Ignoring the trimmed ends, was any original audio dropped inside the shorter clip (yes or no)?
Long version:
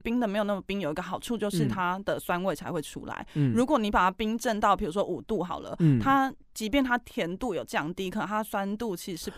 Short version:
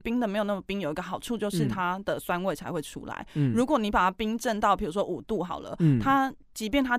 no